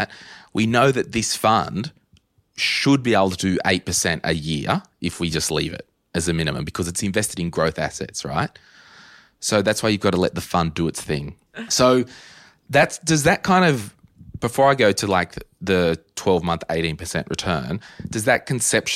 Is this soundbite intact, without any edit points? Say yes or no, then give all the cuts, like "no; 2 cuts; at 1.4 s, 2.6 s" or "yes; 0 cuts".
no; 1 cut; at 11.5 s